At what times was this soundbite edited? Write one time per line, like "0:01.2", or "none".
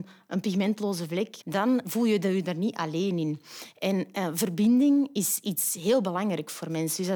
0:01.4